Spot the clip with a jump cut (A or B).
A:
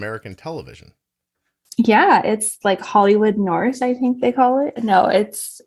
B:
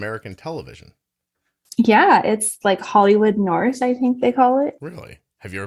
A